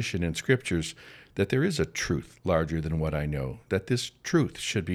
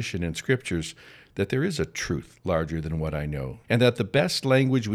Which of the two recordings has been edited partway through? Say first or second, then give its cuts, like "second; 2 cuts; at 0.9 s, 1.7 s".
second; 1 cut; at 3.6 s